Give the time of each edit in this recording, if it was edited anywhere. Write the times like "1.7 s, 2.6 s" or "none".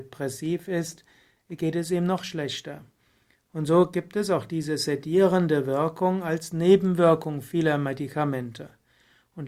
none